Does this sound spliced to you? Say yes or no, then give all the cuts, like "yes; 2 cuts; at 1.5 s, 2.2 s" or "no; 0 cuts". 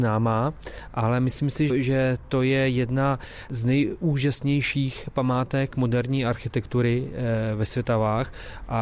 yes; 1 cut; at 1.7 s